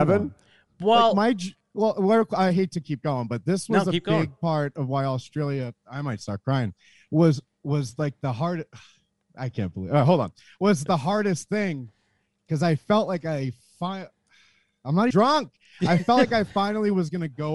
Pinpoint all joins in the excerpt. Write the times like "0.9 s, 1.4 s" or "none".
15.1 s